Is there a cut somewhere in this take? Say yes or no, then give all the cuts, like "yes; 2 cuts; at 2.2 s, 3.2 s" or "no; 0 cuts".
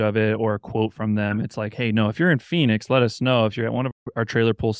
no; 0 cuts